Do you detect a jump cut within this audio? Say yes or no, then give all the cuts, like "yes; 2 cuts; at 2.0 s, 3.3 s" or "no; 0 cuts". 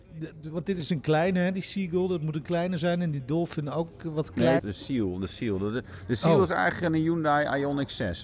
yes; 1 cut; at 4.6 s